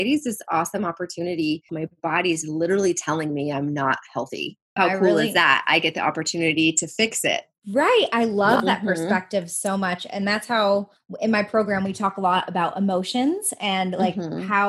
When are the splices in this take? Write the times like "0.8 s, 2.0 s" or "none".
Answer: 1.7 s